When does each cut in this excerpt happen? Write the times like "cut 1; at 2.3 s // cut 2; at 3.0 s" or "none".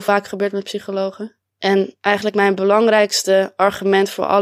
none